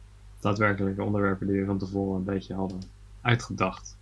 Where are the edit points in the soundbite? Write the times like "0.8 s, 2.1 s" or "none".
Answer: none